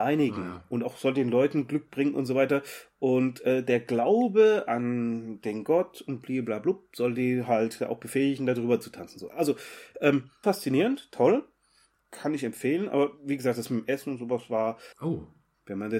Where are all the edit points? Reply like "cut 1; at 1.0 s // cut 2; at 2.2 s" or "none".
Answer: cut 1; at 10.4 s // cut 2; at 12.0 s // cut 3; at 14.9 s